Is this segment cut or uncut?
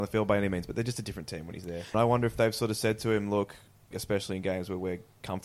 cut